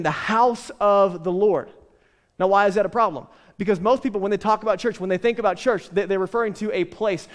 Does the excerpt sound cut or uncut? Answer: uncut